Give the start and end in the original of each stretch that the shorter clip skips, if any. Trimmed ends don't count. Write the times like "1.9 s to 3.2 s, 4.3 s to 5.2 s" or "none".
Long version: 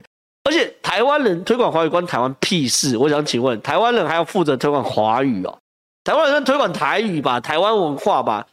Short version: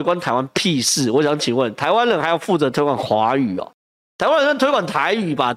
none